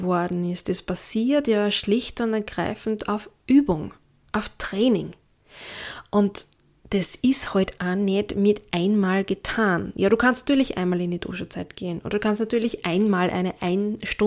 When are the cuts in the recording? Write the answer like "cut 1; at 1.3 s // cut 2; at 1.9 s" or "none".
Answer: cut 1; at 7.8 s